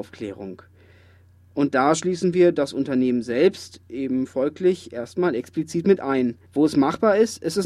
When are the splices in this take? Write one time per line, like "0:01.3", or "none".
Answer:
0:06.5

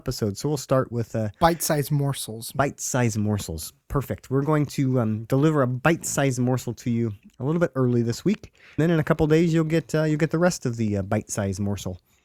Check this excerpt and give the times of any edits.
0:08.8

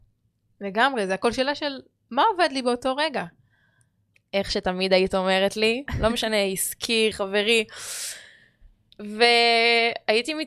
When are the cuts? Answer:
0:05.9
0:07.1

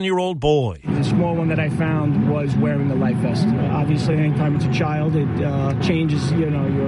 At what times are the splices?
none

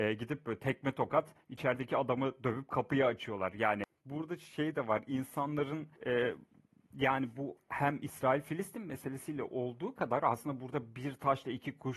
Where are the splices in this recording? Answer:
0:06.0

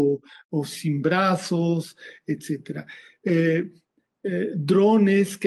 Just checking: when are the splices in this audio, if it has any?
none

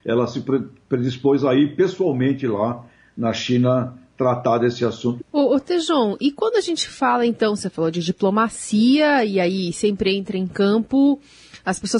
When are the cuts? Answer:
0:05.2

